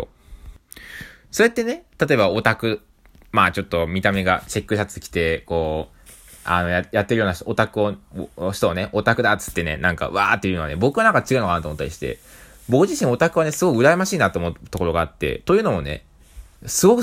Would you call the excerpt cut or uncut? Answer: uncut